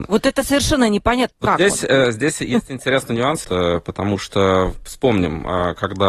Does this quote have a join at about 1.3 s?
yes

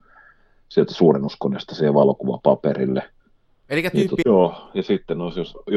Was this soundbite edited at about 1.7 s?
no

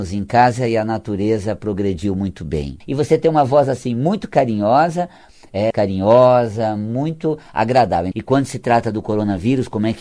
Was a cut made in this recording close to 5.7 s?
yes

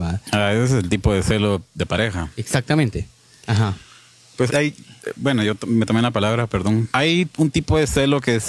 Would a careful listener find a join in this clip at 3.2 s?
no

